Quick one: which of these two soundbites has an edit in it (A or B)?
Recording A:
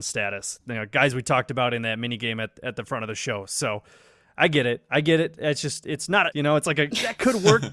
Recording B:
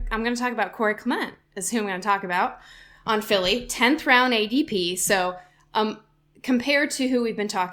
A